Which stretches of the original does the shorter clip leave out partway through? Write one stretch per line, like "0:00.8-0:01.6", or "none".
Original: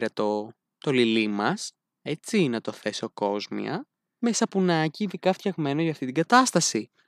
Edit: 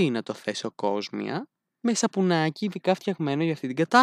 none